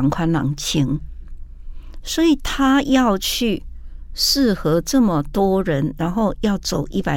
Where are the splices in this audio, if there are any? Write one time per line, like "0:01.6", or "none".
none